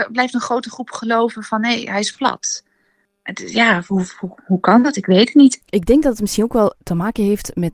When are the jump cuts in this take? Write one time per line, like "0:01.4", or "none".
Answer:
0:05.6